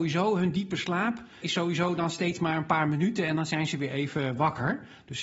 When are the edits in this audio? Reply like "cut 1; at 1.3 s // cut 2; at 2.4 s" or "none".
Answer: cut 1; at 1.4 s